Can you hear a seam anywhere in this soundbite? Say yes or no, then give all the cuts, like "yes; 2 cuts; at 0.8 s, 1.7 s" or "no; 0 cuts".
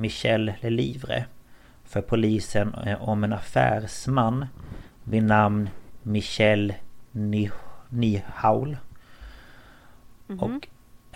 no; 0 cuts